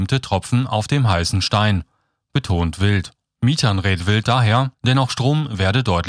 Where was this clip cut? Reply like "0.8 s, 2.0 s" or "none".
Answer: 3.4 s, 4.7 s